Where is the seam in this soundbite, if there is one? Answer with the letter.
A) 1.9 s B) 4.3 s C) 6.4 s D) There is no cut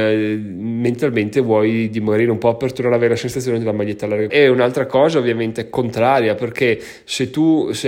B